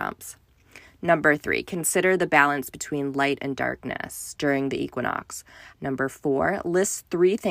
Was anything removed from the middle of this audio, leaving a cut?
yes; 1 cut; at 5.7 s

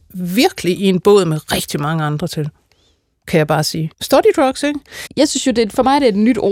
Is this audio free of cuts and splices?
no; 2 cuts; at 3.9 s, 5.1 s

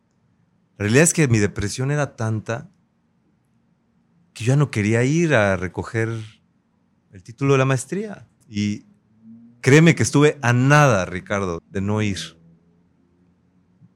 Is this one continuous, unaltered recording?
no; 2 cuts; at 8.4 s, 11.6 s

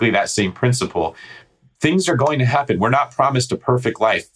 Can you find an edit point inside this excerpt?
no; 0 cuts

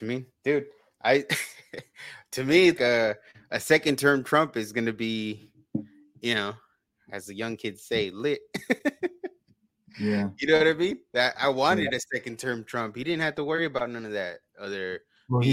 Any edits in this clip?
yes; 1 cut; at 2.8 s

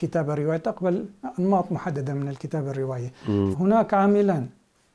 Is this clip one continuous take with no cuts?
no; 1 cut; at 3.5 s

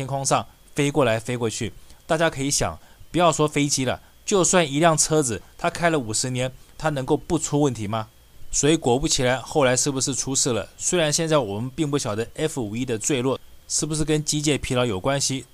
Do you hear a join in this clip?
no; 0 cuts

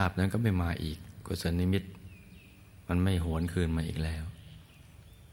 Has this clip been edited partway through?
no; 0 cuts

